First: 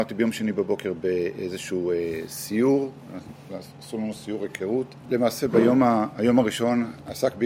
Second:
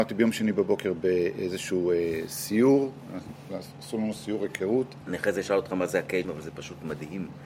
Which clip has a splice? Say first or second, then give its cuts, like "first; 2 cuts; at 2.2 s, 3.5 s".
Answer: second; 2 cuts; at 5.0 s, 6.2 s